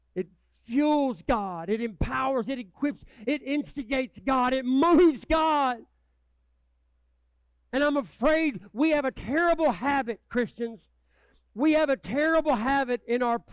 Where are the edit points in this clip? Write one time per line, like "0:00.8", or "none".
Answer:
none

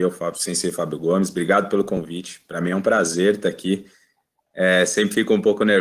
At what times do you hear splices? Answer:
none

